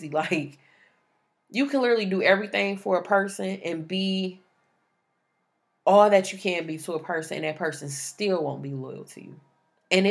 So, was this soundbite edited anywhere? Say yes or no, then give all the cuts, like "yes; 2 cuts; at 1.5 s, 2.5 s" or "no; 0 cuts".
no; 0 cuts